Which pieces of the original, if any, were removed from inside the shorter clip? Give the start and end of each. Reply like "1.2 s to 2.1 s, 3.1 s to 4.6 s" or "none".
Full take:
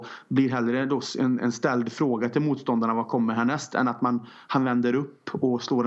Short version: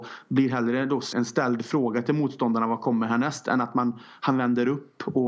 1.1 s to 1.4 s